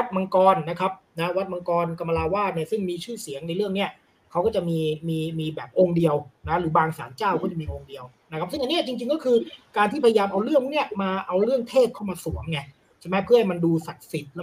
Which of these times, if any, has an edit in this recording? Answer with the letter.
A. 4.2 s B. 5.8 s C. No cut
C